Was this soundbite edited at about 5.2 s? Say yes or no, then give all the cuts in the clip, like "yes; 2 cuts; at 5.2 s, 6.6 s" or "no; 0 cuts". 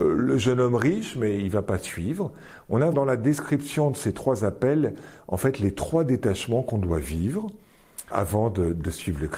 no; 2 cuts; at 2.9 s, 8.1 s